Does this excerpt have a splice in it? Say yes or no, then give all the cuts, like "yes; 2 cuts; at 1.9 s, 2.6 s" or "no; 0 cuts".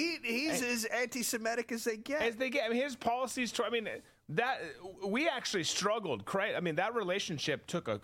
no; 0 cuts